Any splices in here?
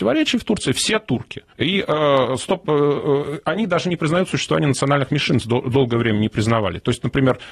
yes; 1 cut; at 1.5 s

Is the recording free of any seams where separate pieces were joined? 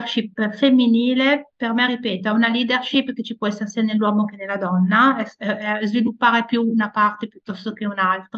yes; 0 cuts

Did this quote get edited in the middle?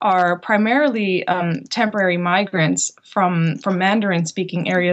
no; 0 cuts

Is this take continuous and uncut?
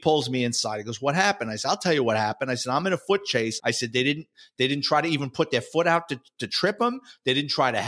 no; 1 cut; at 3.6 s

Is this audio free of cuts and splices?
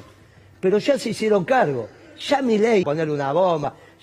no; 1 cut; at 2.8 s

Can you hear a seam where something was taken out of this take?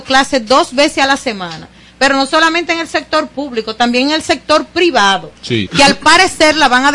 yes; 1 cut; at 5.7 s

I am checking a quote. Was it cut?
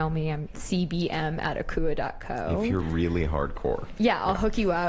no; 0 cuts

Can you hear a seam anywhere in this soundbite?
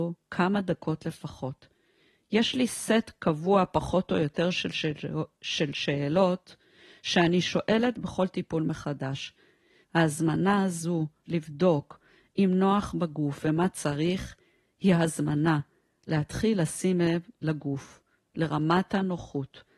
yes; 2 cuts; at 9.8 s, 11.3 s

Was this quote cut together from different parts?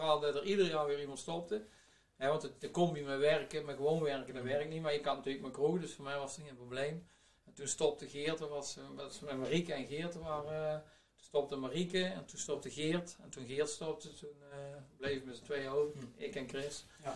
no; 0 cuts

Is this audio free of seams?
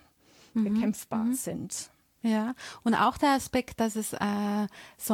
yes; 0 cuts

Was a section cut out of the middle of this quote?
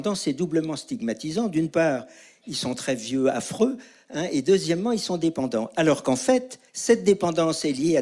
yes; 1 cut; at 6.7 s

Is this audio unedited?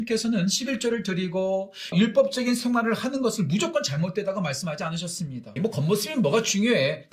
no; 2 cuts; at 1.9 s, 5.6 s

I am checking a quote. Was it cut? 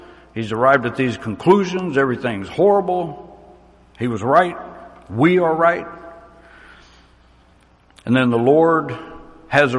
no; 0 cuts

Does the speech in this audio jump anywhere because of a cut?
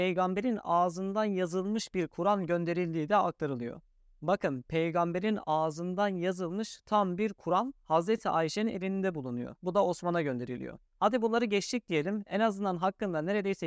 no; 0 cuts

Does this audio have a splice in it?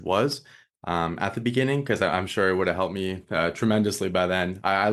no; 0 cuts

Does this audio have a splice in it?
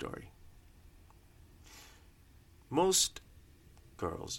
yes; 1 cut; at 2.6 s

